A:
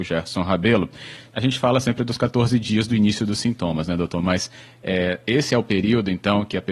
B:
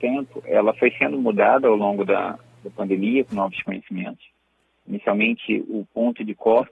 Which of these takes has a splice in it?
A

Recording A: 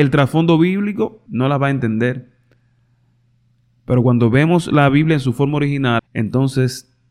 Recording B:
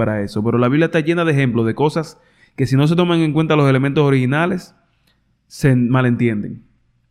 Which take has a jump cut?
A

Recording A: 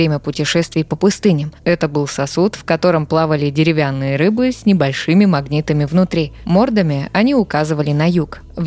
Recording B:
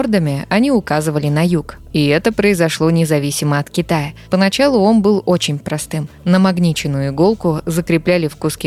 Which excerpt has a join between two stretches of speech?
B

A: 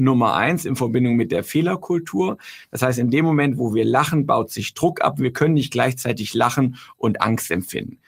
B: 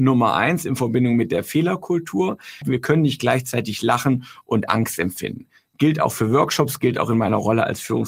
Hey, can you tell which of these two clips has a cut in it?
B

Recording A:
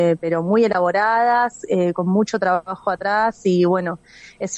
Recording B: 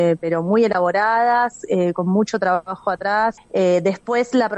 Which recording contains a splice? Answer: B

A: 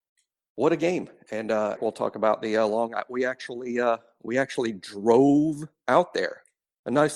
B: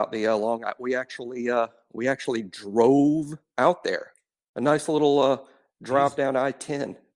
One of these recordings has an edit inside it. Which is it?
A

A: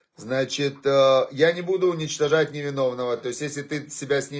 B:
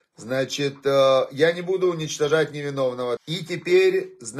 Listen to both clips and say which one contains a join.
B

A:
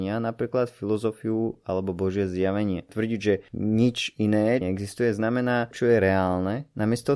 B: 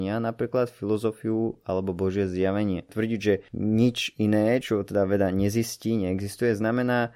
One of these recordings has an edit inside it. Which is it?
A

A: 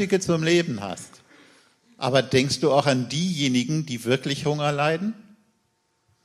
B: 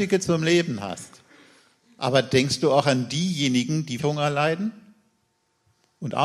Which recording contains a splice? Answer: B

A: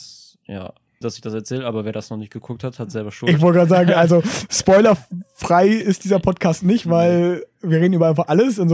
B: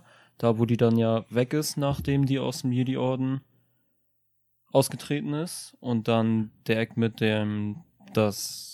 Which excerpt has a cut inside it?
A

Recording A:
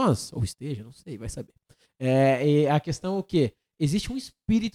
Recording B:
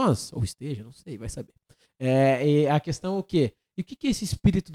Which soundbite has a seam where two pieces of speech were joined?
B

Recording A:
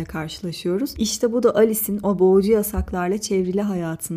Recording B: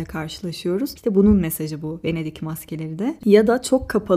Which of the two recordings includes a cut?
B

